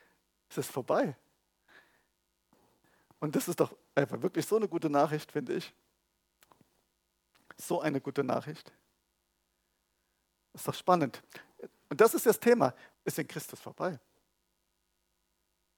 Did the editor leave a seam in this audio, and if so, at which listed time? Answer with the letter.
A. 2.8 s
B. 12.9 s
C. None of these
B